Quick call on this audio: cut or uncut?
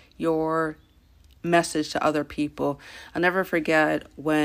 uncut